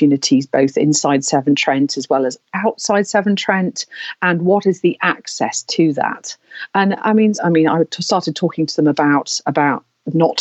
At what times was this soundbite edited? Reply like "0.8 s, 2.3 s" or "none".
7.3 s, 9.5 s